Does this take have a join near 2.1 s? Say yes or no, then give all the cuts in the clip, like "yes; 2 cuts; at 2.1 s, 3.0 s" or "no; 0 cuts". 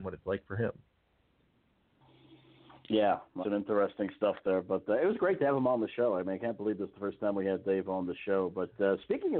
no; 1 cut; at 3.4 s